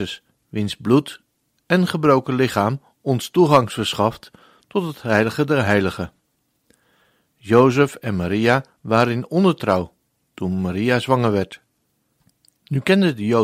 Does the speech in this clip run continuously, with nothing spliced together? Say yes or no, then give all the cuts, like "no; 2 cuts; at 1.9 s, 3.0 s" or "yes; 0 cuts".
yes; 0 cuts